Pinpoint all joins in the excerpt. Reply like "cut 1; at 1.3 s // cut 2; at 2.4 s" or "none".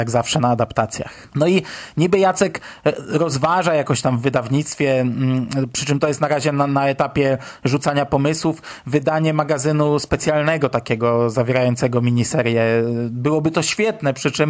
cut 1; at 1.3 s